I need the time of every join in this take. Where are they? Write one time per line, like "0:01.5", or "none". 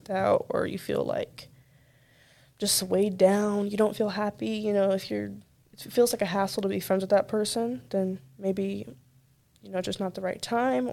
none